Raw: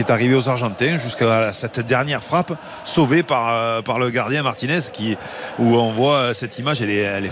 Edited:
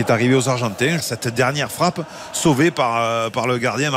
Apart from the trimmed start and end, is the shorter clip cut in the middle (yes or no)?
yes